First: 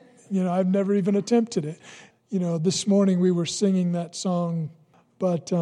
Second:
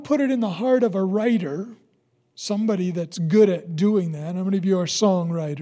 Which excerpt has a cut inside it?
first; 1 cut; at 2.1 s

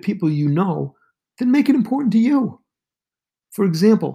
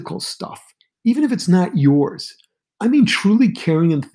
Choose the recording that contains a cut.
second; 1 cut; at 2.6 s

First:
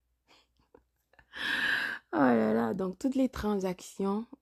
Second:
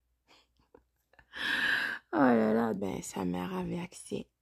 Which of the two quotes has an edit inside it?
second; 1 cut; at 2.8 s

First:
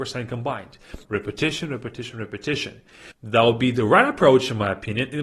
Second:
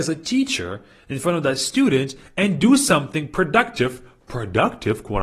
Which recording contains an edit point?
first; 2 cuts; at 1.0 s, 3.1 s

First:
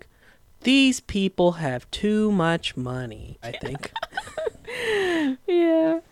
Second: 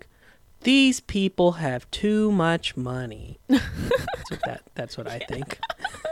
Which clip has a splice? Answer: first; 1 cut; at 3.4 s

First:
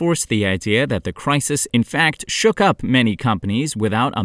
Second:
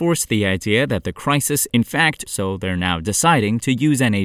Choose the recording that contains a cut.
second; 1 cut; at 2.3 s

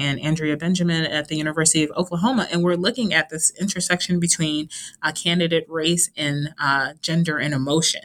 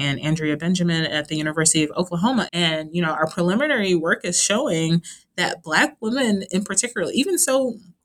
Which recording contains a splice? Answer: second; 1 cut; at 2.5 s

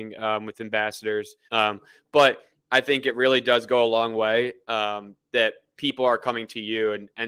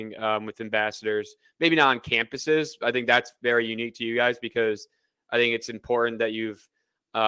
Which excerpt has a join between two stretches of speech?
first; 1 cut; at 1.5 s

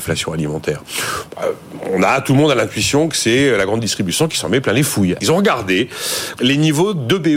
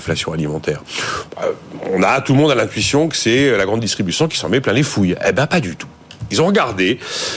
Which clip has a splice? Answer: first; 2 cuts; at 5.2 s, 6.4 s

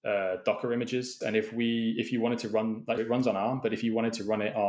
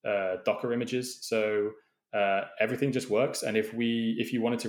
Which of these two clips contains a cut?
first; 2 cuts; at 1.2 s, 3.0 s

